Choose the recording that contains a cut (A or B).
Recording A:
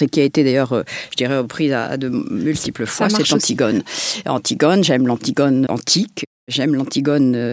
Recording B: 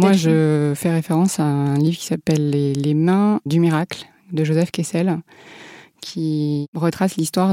A